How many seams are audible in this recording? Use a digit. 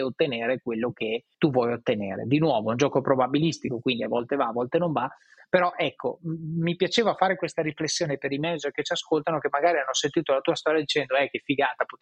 1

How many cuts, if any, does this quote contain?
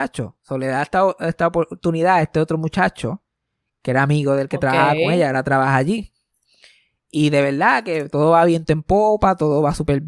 0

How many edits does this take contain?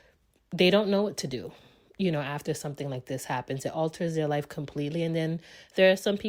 0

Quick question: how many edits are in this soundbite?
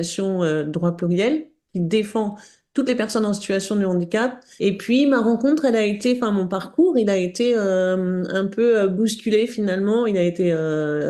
1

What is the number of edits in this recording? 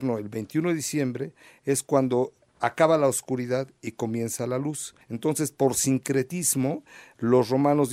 1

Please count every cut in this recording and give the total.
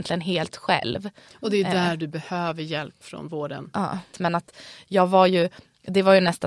1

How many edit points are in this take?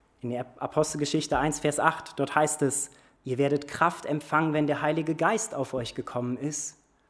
1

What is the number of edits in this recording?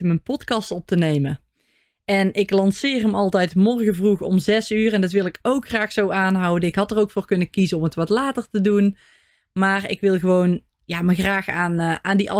0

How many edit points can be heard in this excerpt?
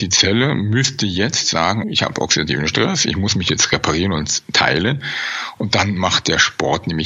2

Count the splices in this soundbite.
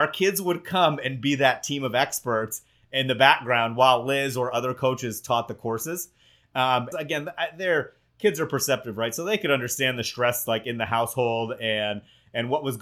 1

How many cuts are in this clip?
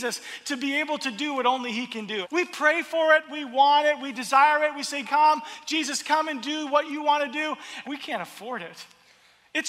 3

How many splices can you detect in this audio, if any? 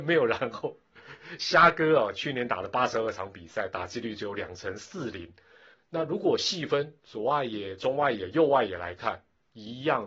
1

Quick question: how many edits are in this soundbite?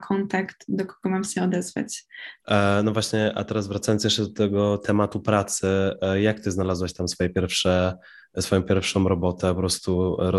1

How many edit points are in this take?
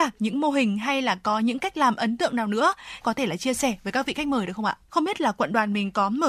2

